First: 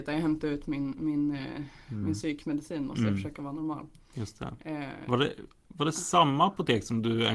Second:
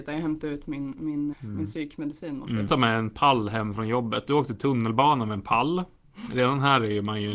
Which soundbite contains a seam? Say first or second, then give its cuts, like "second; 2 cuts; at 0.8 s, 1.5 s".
second; 2 cuts; at 1.3 s, 2.7 s